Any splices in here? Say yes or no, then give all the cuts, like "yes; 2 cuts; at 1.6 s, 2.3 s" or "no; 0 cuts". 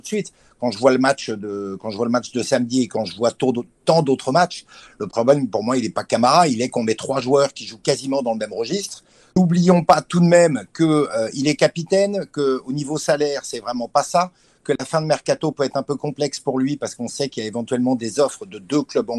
yes; 1 cut; at 9.3 s